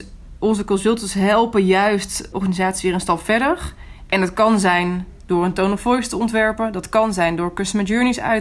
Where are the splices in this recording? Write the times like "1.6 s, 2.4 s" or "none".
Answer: none